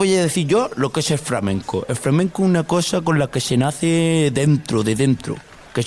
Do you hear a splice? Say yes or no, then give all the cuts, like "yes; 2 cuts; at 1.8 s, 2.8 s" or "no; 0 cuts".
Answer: no; 0 cuts